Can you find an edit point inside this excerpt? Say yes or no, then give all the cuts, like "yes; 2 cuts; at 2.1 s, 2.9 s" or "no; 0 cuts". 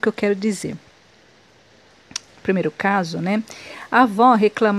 yes; 1 cut; at 2.3 s